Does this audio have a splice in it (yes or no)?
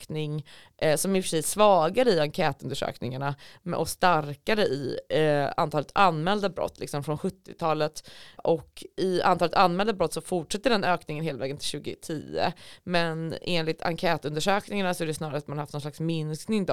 yes